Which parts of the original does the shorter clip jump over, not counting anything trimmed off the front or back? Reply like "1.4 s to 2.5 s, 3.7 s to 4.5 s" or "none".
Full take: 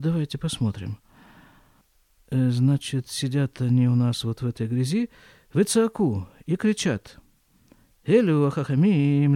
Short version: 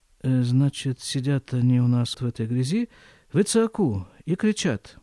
4.2 s to 4.3 s